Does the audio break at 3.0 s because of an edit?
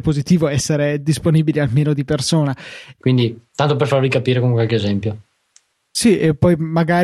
yes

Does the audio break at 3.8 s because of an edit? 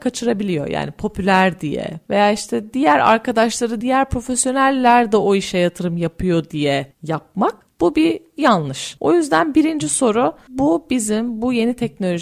yes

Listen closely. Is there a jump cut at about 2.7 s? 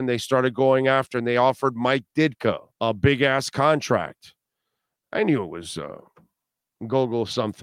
yes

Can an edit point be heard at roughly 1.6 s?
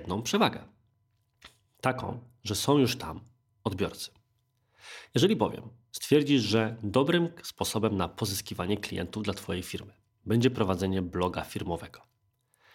no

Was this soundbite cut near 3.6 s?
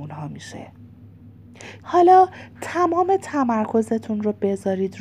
no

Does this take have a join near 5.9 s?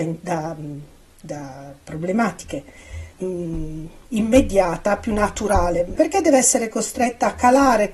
yes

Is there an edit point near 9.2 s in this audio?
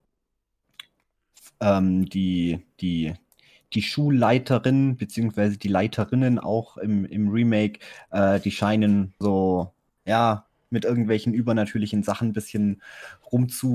yes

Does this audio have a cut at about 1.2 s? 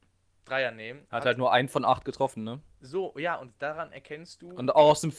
no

